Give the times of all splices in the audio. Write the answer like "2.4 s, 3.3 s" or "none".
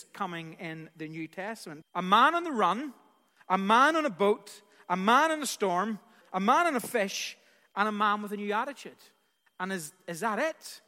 1.8 s, 6.2 s